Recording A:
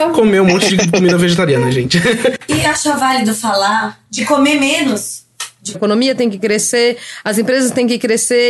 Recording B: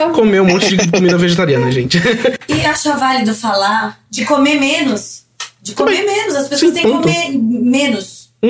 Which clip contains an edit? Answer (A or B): A